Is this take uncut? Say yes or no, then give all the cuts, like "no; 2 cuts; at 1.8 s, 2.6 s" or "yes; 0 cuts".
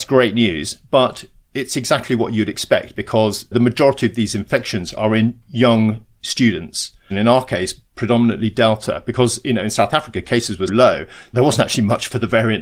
no; 2 cuts; at 7.1 s, 10.7 s